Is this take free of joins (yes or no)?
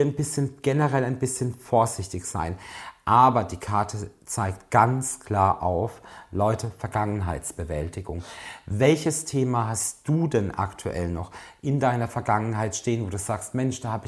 yes